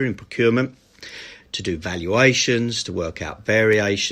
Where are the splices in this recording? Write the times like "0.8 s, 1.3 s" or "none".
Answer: 1.4 s